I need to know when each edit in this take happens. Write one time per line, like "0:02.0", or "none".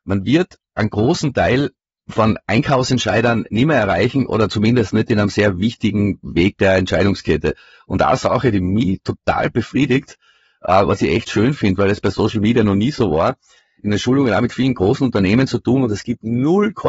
0:13.8